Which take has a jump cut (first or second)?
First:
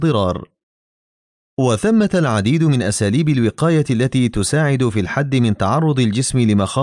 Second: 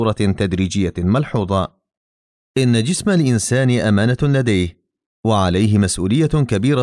second